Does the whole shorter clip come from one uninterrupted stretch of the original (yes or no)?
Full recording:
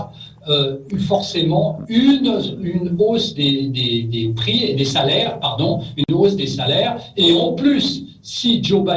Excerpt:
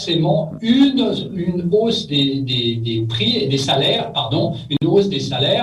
yes